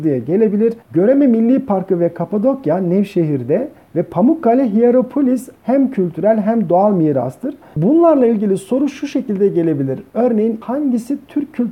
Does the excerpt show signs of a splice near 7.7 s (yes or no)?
yes